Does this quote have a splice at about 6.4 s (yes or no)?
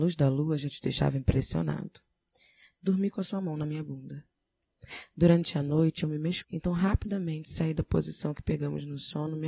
yes